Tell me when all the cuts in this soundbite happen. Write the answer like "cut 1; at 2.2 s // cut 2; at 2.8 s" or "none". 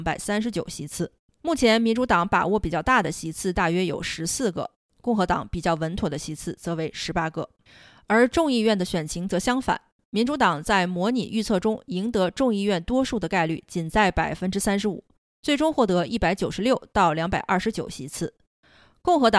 cut 1; at 1.4 s